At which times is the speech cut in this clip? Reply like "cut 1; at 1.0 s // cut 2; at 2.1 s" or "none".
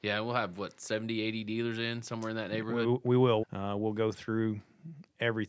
cut 1; at 3.4 s